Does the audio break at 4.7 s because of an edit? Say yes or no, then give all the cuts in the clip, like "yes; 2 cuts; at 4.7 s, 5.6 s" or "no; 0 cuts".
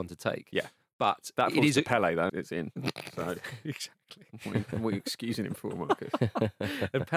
no; 1 cut; at 2.3 s